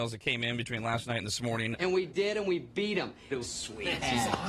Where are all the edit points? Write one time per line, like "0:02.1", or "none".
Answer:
0:01.7
0:03.3